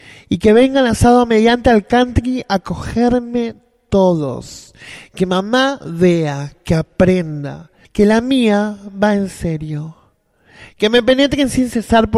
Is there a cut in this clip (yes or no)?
yes